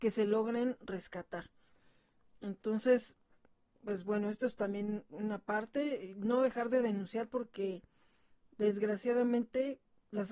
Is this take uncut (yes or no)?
yes